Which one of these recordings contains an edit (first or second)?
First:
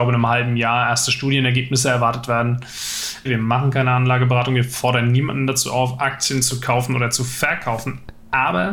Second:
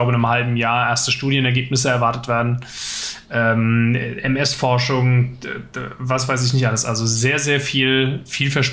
first